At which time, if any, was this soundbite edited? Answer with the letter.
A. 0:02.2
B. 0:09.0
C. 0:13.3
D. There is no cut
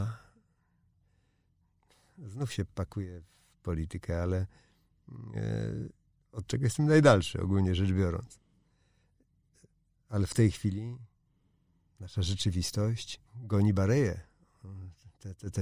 C